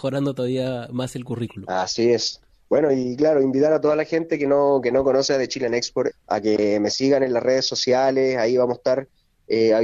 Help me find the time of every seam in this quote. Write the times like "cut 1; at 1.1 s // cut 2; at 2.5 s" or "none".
cut 1; at 6.1 s